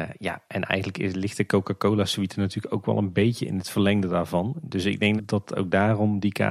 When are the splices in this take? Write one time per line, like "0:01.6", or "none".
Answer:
0:05.2